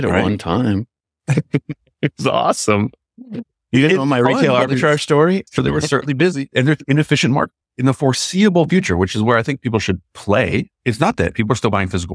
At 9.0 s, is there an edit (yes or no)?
no